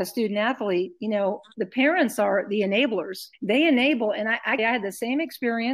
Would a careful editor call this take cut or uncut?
cut